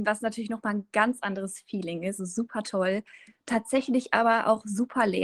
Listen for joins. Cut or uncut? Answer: cut